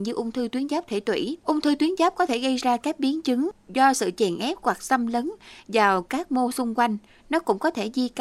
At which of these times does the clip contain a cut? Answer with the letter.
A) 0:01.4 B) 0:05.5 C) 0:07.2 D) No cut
A